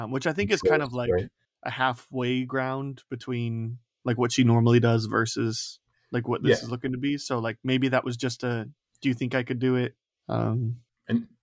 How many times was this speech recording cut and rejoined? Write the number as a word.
zero